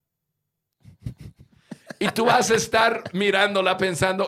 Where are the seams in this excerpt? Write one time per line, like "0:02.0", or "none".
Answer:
none

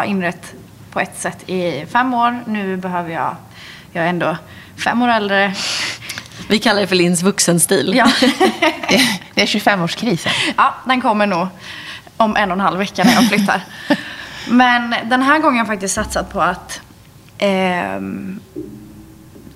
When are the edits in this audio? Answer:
none

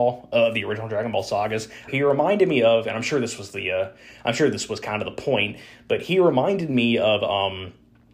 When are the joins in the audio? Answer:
0:01.9

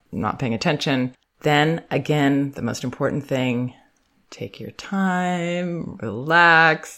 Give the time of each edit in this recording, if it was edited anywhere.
0:01.2

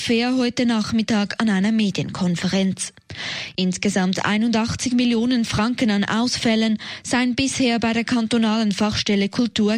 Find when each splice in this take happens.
none

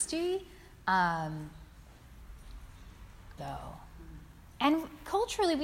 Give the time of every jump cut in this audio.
0:03.4

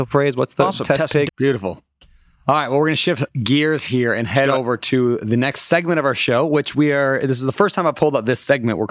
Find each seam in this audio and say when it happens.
0:01.3

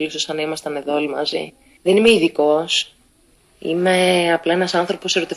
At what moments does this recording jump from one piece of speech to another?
0:01.8

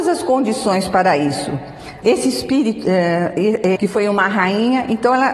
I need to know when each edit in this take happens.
0:02.0
0:03.8

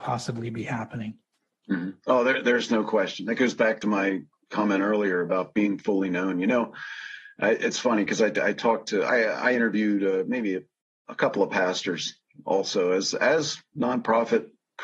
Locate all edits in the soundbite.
none

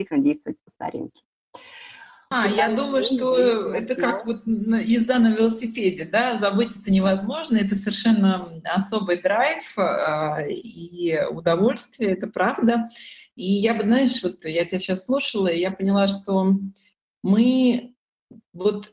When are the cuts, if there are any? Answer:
0:02.3

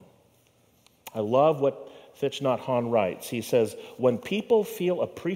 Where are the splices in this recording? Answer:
none

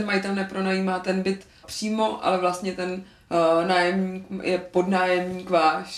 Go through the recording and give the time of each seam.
0:01.6

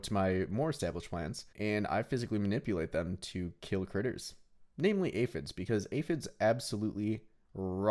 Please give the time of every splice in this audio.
0:01.5

